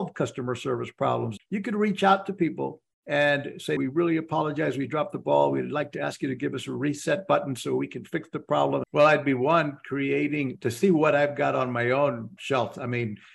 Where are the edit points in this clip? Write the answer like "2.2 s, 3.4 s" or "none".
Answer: 1.4 s, 3.8 s, 8.8 s